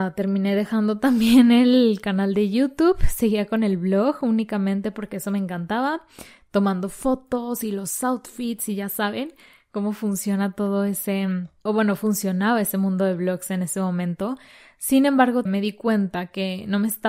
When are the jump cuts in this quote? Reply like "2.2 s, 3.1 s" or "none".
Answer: 11.7 s, 15.5 s